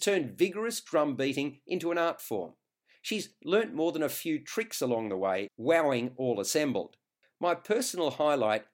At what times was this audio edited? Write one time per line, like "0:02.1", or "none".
0:05.5
0:07.2